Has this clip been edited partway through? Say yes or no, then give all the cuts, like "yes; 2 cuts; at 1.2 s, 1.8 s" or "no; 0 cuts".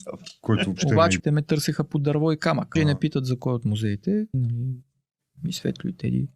yes; 3 cuts; at 1.2 s, 2.8 s, 4.3 s